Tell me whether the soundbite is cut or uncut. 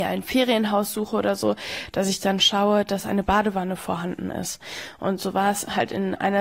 uncut